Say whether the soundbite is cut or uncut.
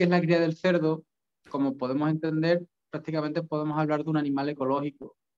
uncut